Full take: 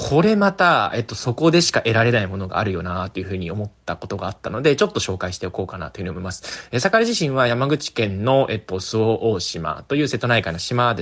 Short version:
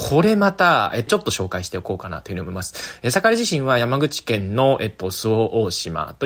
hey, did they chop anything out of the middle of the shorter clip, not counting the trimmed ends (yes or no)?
yes